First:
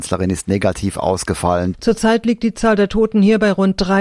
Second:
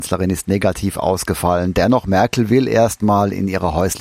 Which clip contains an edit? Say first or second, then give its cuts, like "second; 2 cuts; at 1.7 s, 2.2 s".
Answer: first; 1 cut; at 1.7 s